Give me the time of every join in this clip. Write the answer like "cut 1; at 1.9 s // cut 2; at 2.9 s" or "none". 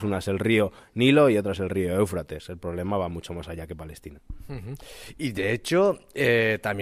none